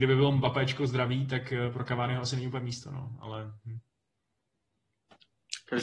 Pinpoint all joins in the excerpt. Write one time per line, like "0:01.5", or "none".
none

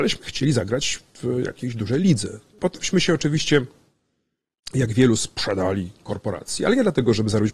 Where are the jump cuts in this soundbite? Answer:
0:02.6

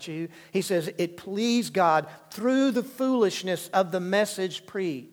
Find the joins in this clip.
none

